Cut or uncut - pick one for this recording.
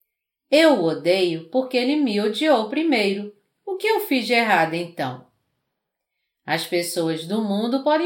uncut